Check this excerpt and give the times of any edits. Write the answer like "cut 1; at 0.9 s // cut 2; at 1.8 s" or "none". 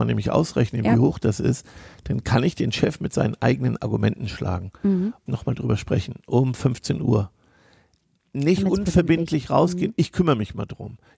cut 1; at 5.3 s